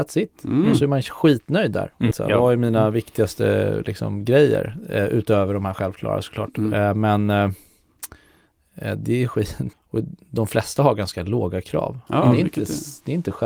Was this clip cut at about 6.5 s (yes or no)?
no